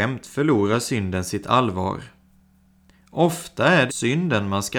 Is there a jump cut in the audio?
yes; 1 cut; at 3.9 s

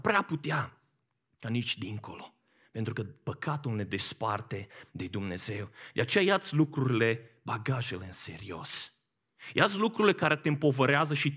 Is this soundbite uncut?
yes; 0 cuts

